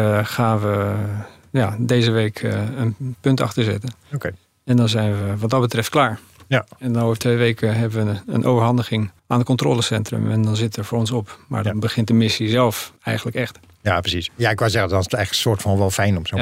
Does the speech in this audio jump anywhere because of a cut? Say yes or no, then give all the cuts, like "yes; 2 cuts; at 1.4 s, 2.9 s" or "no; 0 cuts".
yes; 3 cuts; at 9.2 s, 13.0 s, 14.3 s